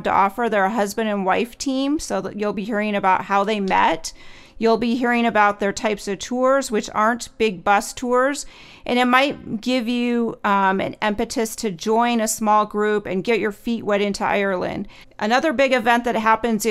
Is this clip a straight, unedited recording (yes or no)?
no